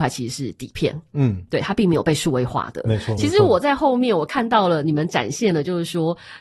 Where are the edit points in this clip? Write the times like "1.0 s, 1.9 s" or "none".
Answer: 3.2 s